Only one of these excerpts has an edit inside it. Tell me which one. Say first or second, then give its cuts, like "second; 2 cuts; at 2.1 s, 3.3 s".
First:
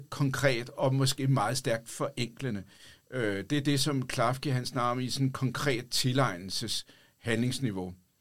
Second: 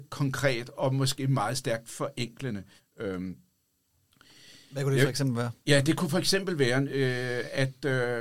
second; 1 cut; at 2.8 s